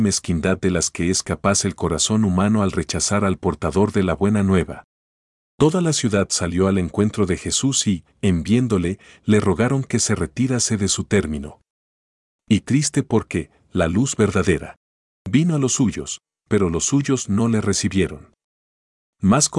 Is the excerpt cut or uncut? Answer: uncut